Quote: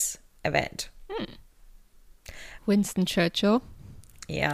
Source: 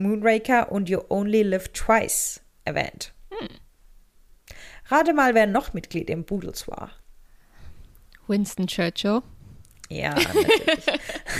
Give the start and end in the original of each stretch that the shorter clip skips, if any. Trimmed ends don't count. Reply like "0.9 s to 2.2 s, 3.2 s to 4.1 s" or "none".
4.8 s to 8.2 s